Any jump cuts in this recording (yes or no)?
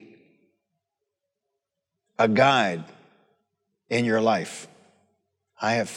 no